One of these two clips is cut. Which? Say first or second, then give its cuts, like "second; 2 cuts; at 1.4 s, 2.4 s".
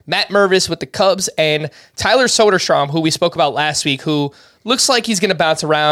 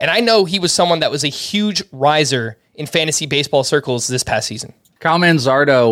second; 1 cut; at 5.0 s